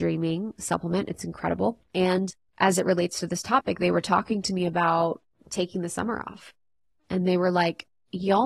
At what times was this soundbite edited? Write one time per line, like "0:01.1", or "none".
0:01.8